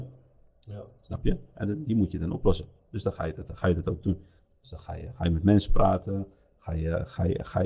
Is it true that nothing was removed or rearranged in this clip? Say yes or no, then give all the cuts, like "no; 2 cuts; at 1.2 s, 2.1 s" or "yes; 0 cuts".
yes; 0 cuts